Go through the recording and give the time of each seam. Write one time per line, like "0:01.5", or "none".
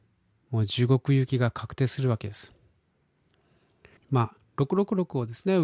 0:04.0